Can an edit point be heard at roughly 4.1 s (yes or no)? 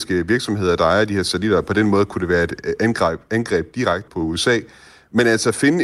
yes